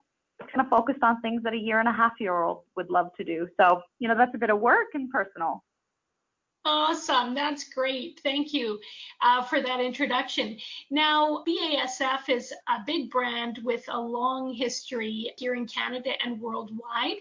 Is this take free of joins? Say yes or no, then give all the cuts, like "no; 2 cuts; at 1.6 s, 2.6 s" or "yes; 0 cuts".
yes; 0 cuts